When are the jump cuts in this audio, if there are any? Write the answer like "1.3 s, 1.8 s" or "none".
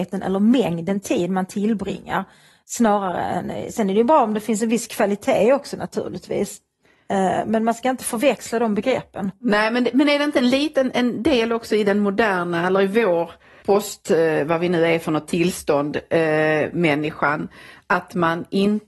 13.6 s